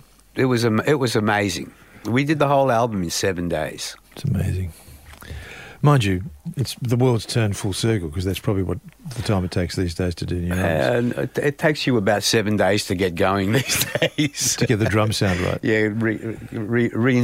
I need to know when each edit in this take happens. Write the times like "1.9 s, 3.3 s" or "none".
4.0 s